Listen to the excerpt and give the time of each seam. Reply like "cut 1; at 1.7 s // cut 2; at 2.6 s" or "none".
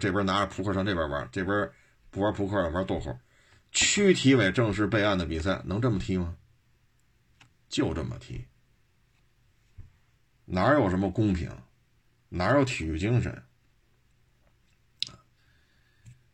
none